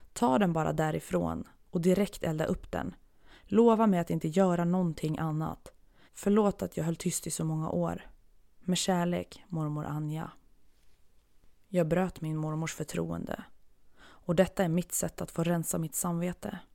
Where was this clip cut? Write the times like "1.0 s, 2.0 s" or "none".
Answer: 6.1 s